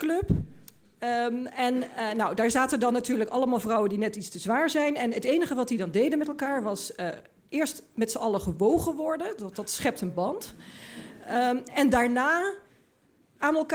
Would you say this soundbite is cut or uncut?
uncut